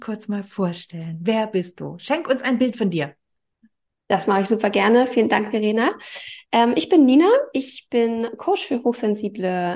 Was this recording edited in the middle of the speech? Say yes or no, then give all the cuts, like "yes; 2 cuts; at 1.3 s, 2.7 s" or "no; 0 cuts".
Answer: no; 0 cuts